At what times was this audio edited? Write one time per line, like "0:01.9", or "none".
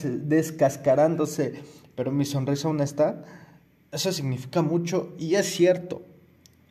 none